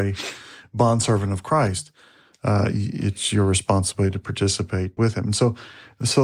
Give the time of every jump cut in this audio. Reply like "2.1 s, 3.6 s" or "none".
2.3 s, 5.0 s

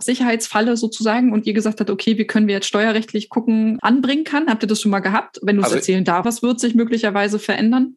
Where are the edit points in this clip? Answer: 3.8 s, 6.2 s

